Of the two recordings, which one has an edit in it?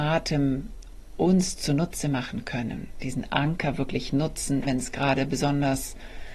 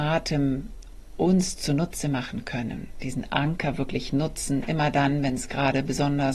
first; 1 cut; at 4.6 s

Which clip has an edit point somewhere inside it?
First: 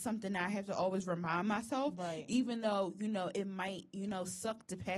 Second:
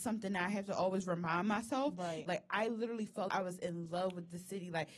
second; 2 cuts; at 2.3 s, 3.3 s

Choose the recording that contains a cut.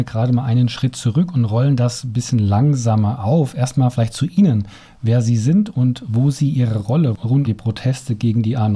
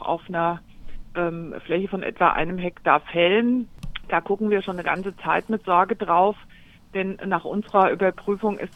first; 1 cut; at 7.4 s

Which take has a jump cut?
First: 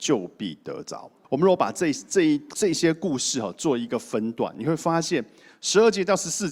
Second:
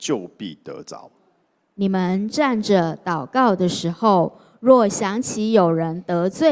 first; 1 cut; at 1.2 s

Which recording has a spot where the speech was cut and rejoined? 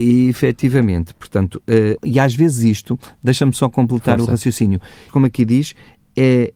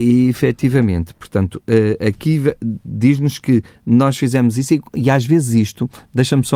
first; 2 cuts; at 2.0 s, 5.1 s

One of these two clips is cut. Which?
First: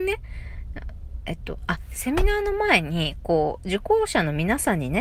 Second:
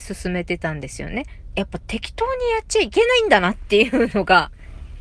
second; 1 cut; at 1.5 s

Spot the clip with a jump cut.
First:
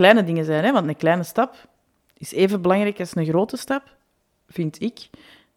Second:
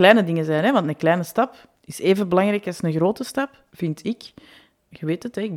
second; 2 cuts; at 1.8 s, 3.7 s

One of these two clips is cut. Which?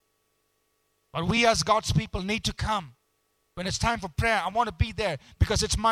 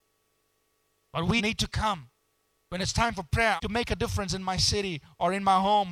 second; 2 cuts; at 1.4 s, 3.6 s

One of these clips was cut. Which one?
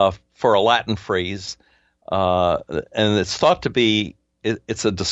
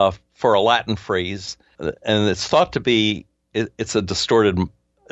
second; 1 cut; at 1.7 s

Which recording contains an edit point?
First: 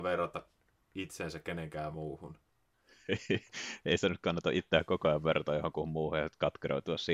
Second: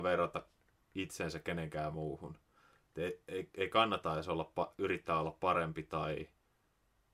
first; 1 cut; at 2.5 s

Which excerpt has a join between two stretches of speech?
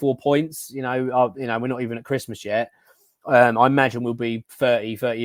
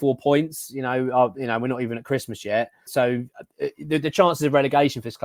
second; 1 cut; at 2.9 s

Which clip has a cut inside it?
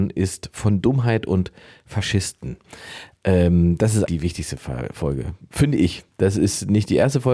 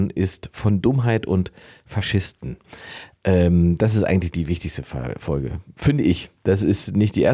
first; 1 cut; at 4.1 s

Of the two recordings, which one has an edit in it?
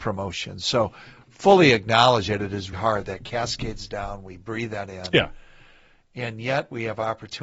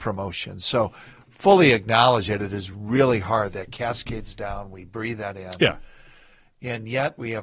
first; 1 cut; at 2.7 s

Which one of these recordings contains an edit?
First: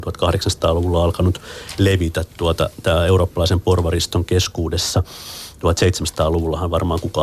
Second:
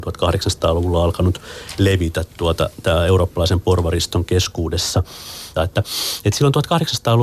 second; 1 cut; at 5.6 s

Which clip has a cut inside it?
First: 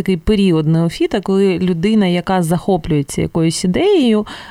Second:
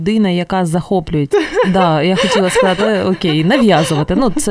second; 2 cuts; at 1.3 s, 2.8 s

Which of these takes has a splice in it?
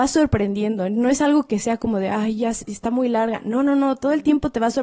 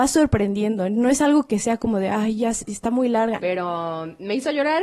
second; 1 cut; at 3.4 s

